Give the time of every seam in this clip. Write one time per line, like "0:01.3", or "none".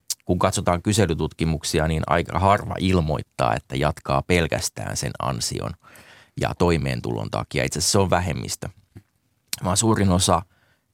none